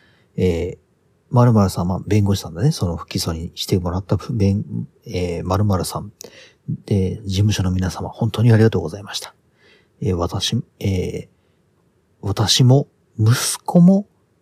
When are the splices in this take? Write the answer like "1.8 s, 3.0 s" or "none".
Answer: none

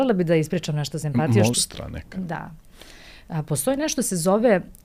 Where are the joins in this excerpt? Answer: 1.5 s

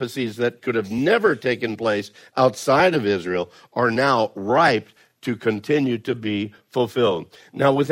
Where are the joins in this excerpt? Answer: none

